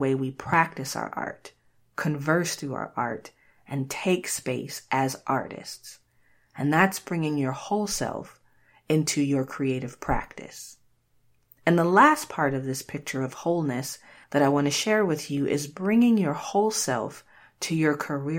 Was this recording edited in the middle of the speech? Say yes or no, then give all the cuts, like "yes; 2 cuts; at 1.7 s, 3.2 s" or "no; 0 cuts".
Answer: no; 0 cuts